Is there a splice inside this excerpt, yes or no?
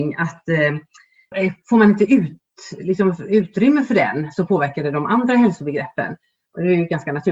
yes